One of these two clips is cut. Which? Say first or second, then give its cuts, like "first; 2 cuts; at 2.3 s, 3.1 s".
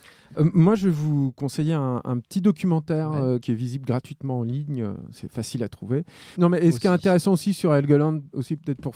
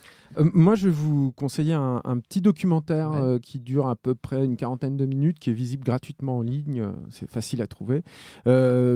first; 2 cuts; at 3.4 s, 6.3 s